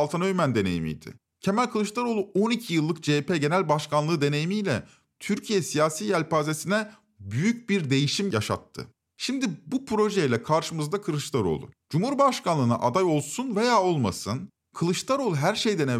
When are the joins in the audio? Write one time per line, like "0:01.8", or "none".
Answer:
0:11.8